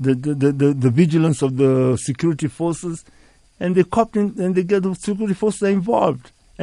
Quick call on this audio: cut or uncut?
uncut